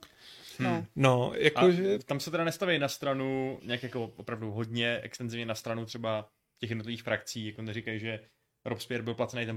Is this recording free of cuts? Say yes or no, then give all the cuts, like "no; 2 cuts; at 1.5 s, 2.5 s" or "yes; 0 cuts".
no; 1 cut; at 3.6 s